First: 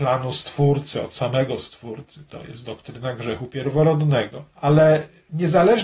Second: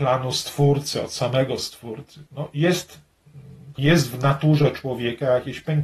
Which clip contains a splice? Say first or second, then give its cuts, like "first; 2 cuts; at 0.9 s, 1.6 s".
second; 2 cuts; at 2.3 s, 3.8 s